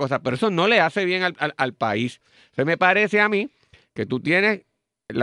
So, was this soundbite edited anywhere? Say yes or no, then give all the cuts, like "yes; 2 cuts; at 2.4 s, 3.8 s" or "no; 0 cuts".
no; 0 cuts